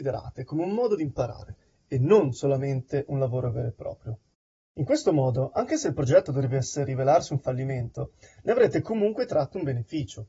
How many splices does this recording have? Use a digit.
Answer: 0